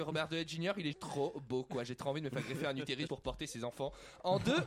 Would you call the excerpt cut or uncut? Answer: cut